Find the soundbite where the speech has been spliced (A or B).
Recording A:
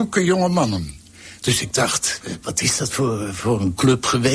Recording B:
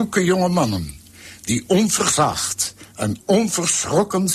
A